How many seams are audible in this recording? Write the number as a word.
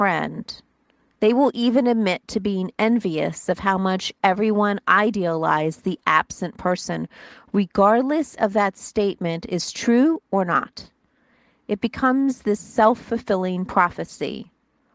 zero